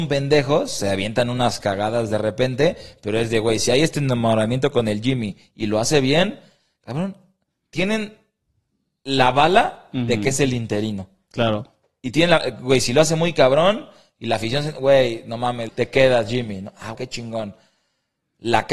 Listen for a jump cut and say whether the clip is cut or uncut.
cut